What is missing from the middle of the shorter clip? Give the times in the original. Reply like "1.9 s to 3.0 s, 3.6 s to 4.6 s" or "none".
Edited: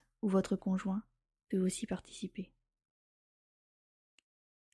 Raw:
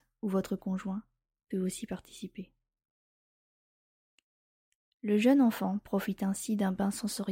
none